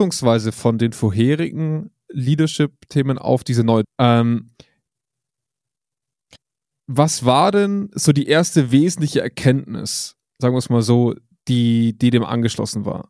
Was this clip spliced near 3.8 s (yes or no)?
yes